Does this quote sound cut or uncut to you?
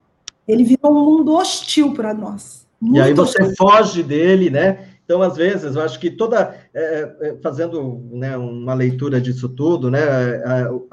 uncut